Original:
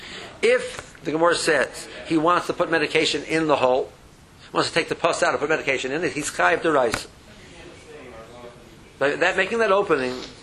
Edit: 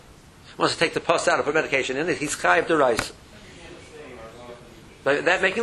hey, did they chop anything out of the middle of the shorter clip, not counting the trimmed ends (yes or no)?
no